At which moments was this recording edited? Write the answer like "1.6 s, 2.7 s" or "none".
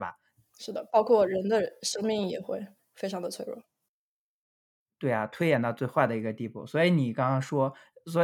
none